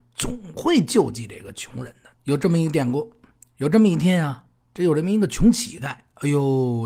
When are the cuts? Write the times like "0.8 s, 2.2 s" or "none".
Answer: 2.1 s